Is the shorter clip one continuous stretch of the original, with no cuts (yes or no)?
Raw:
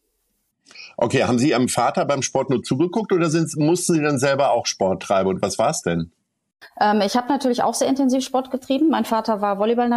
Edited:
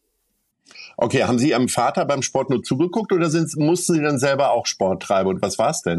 yes